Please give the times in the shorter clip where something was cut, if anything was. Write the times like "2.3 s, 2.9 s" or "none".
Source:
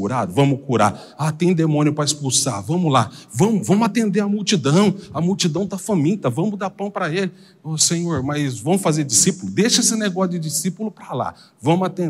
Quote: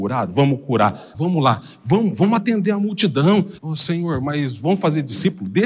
1.1 s, 3.6 s